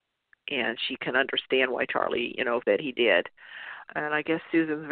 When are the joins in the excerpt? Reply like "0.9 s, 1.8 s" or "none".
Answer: 2.6 s, 3.9 s